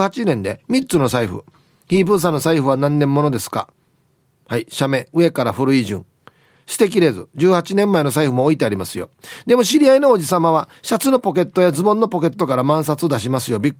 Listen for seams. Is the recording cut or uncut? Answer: uncut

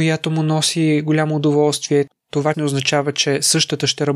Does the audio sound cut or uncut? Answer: cut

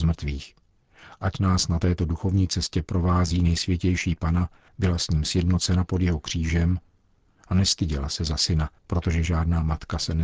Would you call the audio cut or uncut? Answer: cut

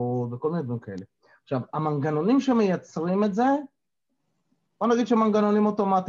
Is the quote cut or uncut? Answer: uncut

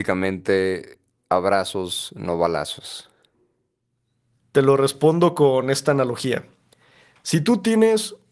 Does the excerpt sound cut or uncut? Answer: uncut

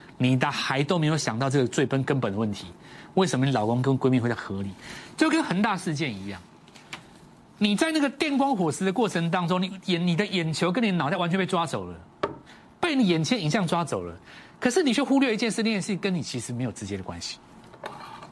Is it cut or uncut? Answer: uncut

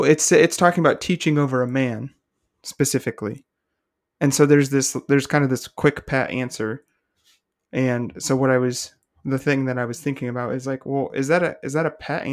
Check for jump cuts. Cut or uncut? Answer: uncut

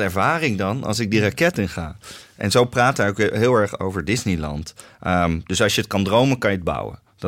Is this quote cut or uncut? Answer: uncut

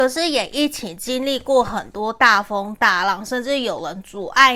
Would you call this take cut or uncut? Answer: uncut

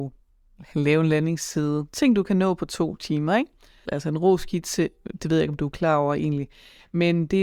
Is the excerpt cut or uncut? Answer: cut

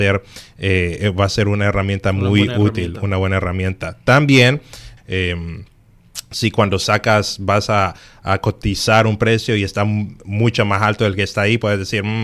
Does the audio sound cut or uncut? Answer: cut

